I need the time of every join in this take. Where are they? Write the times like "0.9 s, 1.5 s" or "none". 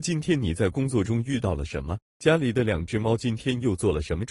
none